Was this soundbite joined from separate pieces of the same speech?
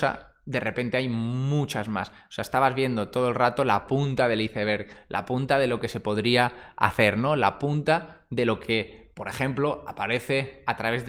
no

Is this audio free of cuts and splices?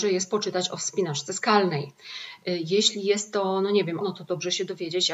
no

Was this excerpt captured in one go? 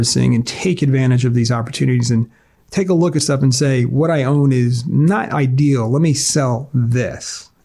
yes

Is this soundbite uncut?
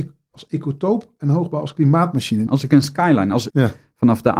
no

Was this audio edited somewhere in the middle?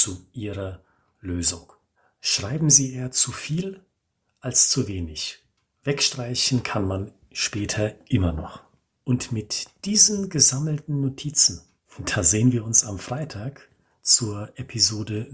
no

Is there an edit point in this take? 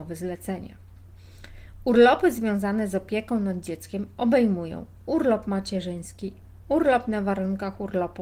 no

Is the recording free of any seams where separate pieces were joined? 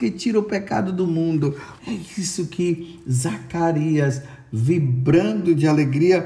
no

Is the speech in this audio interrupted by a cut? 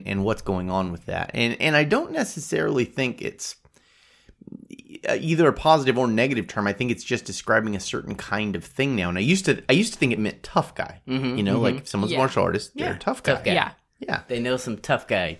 no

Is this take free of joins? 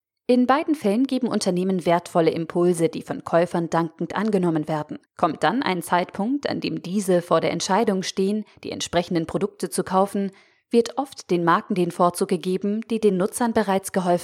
no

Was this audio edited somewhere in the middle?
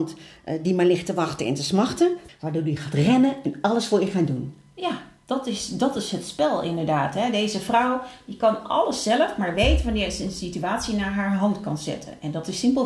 yes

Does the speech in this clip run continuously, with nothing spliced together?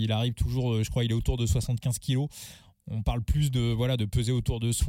yes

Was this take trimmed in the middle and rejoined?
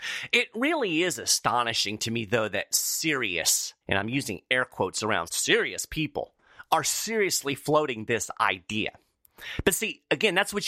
yes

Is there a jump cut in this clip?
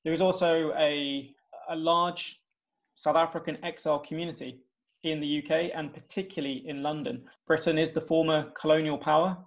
no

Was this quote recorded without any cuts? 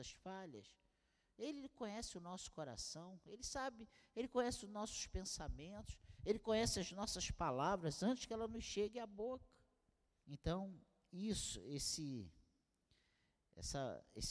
no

